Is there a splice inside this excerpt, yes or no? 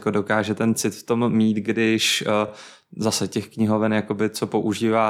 no